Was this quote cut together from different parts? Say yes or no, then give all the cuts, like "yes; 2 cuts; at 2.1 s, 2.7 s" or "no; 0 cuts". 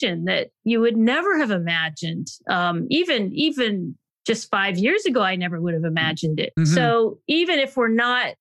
yes; 2 cuts; at 4.1 s, 6.6 s